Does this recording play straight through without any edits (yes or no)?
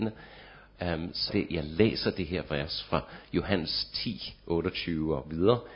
no